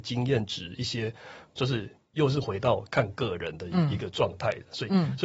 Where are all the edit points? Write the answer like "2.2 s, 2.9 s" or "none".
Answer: 1.6 s, 2.9 s